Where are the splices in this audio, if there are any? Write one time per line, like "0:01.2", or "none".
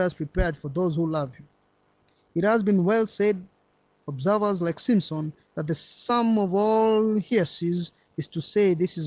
none